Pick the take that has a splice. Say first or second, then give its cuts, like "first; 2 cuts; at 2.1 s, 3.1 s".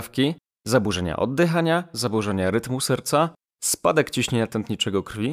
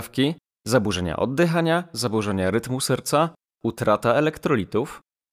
first; 1 cut; at 3.5 s